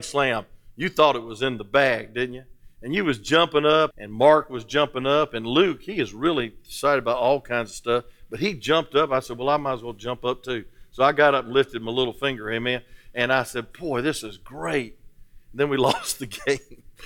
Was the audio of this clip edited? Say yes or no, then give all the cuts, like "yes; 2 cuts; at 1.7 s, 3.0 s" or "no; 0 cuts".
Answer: yes; 1 cut; at 3.9 s